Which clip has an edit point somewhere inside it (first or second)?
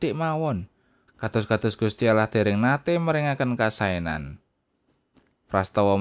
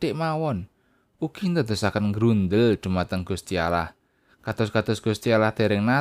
first